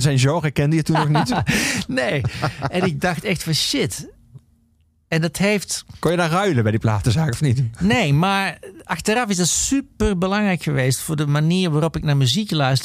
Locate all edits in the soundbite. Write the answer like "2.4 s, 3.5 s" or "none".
none